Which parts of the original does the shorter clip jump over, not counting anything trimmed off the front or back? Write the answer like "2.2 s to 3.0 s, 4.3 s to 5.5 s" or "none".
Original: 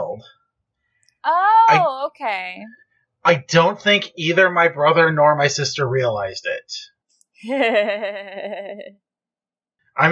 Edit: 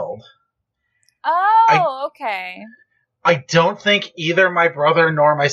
none